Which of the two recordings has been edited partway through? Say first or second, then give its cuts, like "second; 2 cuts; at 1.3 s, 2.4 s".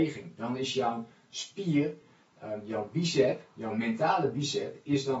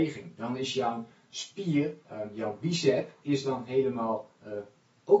second; 2 cuts; at 2.0 s, 3.2 s